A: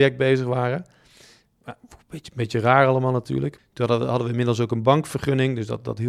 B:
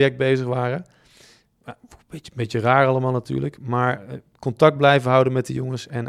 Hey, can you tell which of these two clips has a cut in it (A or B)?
A